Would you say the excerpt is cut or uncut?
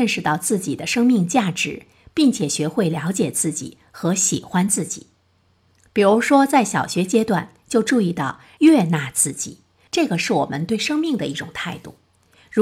cut